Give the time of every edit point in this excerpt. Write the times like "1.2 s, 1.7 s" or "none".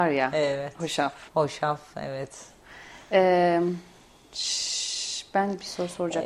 1.3 s